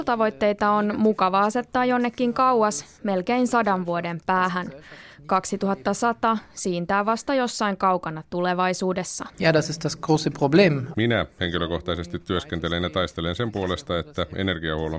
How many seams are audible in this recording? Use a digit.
2